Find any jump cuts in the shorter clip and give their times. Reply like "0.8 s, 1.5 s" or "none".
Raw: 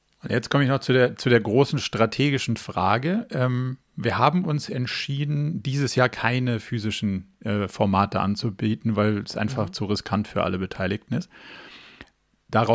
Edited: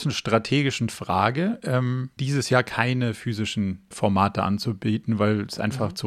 2.2 s, 3.9 s